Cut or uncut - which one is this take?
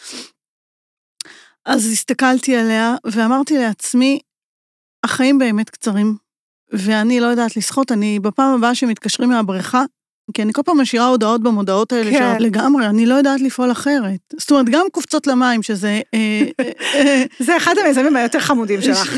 cut